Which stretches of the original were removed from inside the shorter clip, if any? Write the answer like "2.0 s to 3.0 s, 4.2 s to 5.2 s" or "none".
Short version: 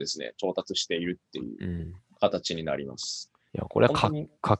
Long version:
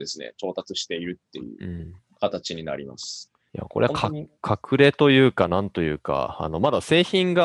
none